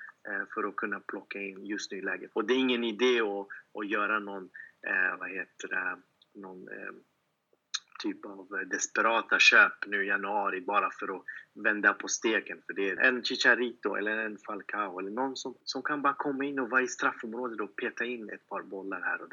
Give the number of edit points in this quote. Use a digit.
3